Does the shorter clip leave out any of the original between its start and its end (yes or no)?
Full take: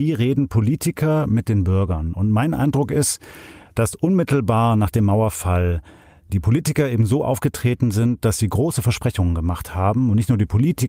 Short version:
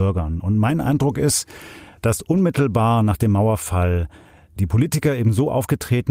no